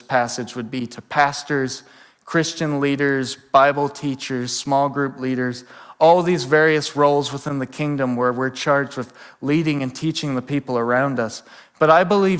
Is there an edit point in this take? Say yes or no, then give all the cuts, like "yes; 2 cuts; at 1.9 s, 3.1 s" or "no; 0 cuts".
no; 0 cuts